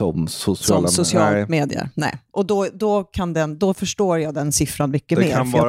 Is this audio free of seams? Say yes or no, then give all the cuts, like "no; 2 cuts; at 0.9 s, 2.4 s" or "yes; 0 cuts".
yes; 0 cuts